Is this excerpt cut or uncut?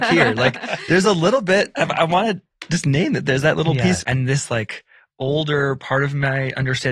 cut